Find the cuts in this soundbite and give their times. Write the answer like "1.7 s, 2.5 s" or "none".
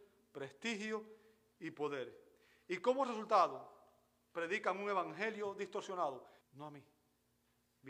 6.4 s